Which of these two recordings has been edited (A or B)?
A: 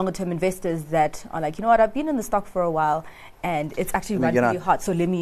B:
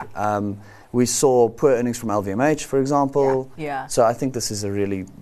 B